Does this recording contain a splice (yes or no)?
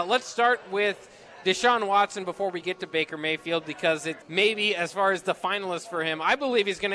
yes